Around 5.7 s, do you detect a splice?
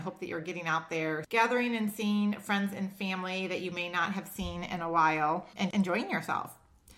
yes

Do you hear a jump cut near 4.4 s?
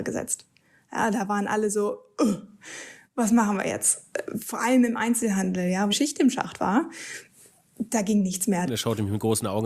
no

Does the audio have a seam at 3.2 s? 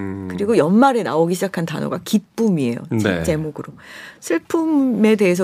no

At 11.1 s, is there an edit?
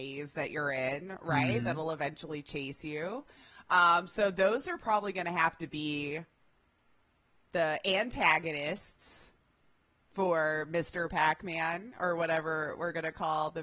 no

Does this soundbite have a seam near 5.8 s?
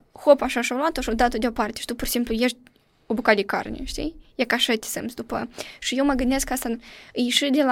no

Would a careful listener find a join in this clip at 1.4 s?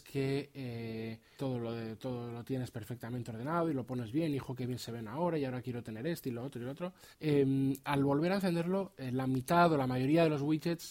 yes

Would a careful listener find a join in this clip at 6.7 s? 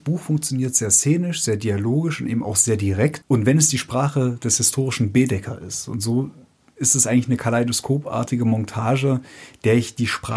no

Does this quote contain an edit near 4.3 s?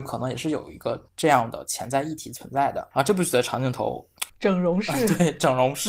yes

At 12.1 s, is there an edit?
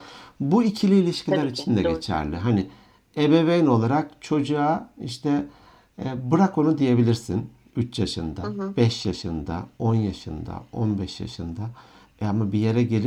no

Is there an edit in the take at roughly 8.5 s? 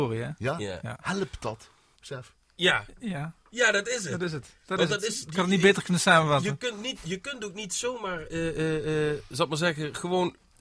no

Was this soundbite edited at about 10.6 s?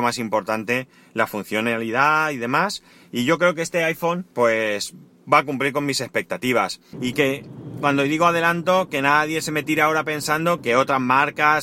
yes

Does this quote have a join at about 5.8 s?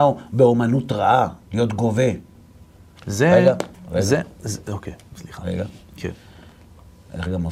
no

